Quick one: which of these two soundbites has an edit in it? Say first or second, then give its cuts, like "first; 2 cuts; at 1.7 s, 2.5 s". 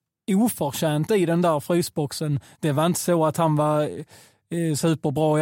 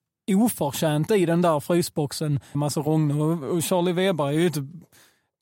second; 1 cut; at 2.5 s